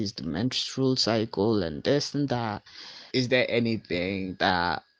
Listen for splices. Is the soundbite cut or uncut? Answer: cut